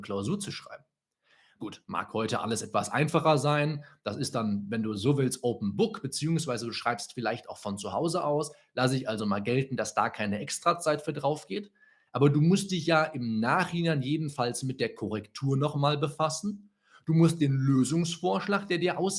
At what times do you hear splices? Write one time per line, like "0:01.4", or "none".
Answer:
0:01.6